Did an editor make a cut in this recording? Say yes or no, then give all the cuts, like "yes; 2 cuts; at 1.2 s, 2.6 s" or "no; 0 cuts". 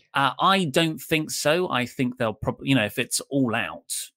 no; 0 cuts